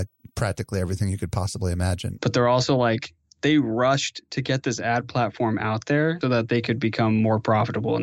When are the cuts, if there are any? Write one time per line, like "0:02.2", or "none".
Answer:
0:02.2
0:06.2